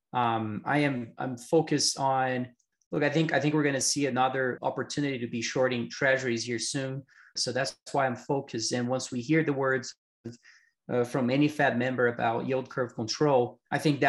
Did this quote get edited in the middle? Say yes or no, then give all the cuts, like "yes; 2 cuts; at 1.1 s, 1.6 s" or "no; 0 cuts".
yes; 2 cuts; at 4.6 s, 7.4 s